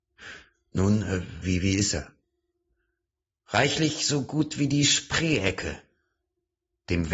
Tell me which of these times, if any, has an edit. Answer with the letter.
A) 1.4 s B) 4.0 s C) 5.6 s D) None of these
A